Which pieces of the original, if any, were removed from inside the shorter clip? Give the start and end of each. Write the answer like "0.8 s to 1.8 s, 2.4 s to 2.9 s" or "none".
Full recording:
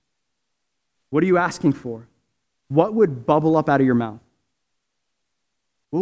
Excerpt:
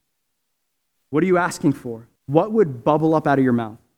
2.2 s to 2.6 s

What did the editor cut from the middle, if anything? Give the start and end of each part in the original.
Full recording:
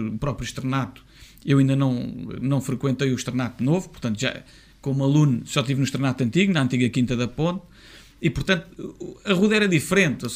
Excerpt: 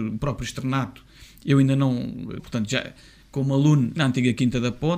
2.4 s to 3.9 s, 5.5 s to 6.5 s

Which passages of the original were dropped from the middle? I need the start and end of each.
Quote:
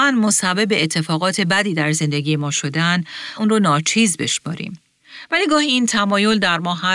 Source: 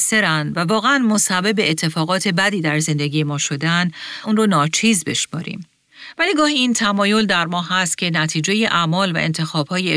none

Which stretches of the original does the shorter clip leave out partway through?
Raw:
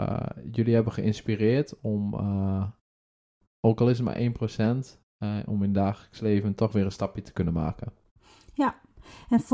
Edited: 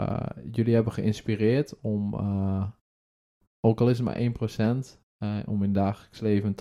none

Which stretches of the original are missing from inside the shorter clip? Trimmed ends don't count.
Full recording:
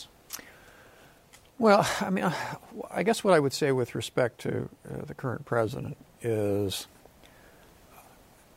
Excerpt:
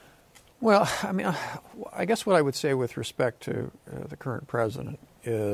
none

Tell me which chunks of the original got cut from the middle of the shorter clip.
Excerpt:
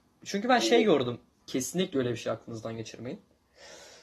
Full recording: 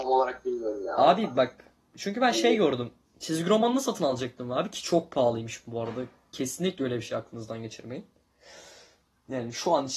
3.1 s to 6.2 s

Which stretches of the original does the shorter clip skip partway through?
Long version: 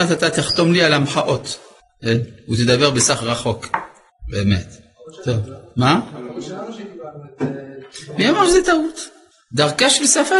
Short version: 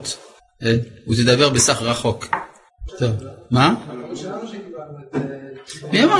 4.3 s to 5.1 s

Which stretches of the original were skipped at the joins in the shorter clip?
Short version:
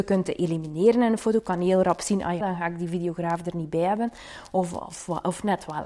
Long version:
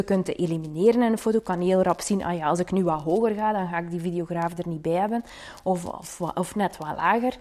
2.4 s to 3.5 s

